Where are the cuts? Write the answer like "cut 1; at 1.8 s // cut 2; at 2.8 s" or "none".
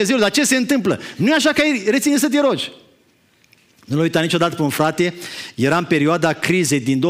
none